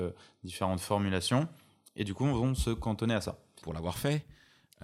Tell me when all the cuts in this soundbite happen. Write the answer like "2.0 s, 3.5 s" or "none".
3.6 s